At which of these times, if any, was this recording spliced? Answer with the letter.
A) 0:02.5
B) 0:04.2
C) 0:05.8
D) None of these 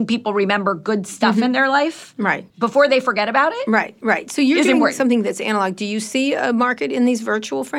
A